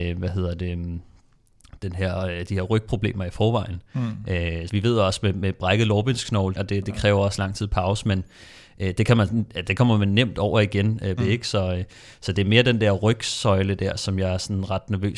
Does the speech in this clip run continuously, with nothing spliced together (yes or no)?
no